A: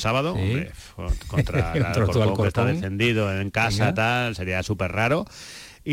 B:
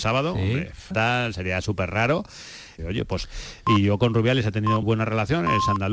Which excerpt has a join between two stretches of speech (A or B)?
B